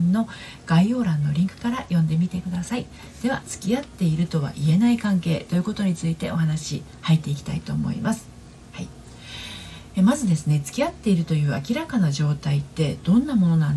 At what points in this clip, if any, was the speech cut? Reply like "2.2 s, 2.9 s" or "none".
3.4 s